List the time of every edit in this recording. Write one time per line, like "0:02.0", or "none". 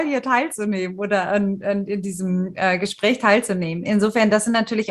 none

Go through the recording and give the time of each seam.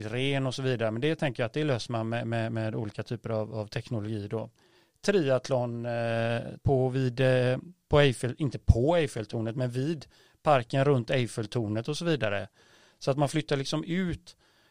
0:06.6

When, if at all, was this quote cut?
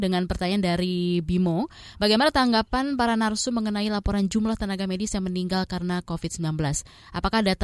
none

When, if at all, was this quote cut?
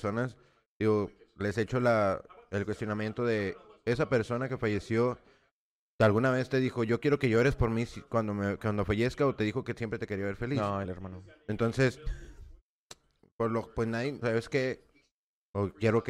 0:10.8
0:14.2

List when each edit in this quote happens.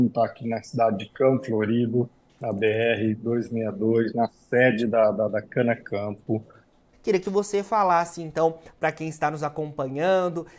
0:06.9

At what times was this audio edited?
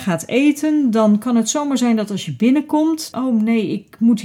0:03.1

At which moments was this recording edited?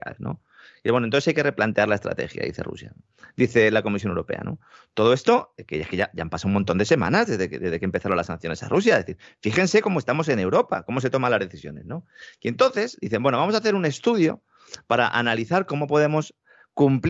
none

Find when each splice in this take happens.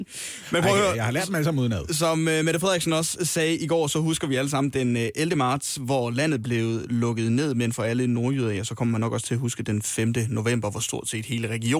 none

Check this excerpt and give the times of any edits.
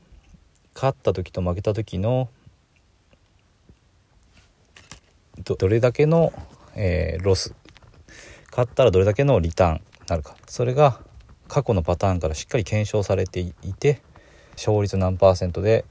0:05.6
0:10.4
0:14.6

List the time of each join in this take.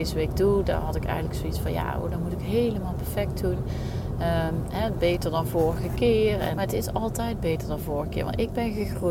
0:06.5

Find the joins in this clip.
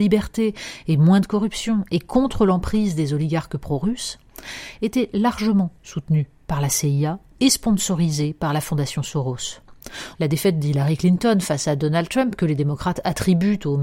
0:10.1

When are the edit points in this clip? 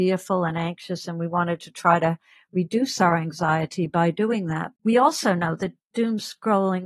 0:04.8

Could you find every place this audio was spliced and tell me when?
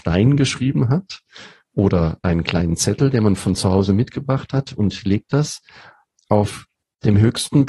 none

